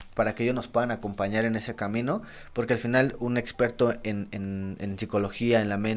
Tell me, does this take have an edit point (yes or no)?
no